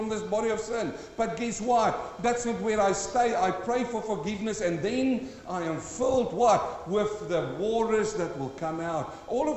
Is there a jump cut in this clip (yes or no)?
no